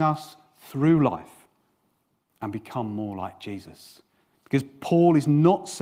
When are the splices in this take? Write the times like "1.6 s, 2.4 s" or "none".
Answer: 4.3 s

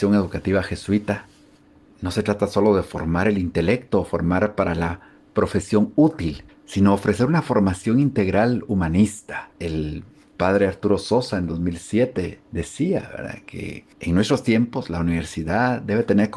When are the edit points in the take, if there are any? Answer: 6.5 s, 12.4 s, 13.9 s

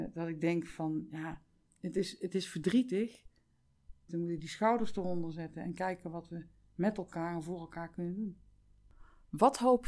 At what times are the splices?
4.1 s

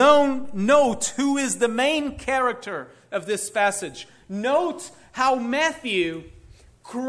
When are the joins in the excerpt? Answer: none

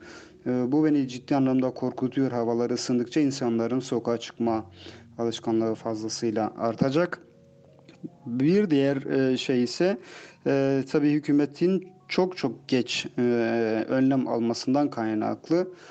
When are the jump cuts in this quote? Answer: none

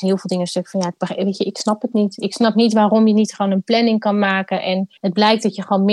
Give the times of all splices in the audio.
5.0 s

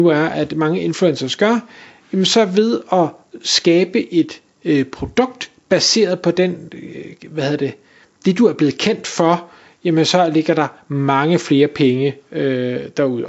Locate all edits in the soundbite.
none

